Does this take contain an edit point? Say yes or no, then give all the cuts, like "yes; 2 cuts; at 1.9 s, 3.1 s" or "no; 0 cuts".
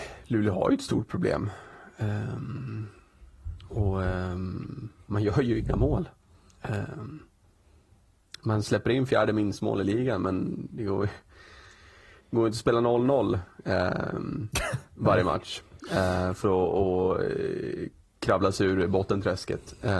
no; 0 cuts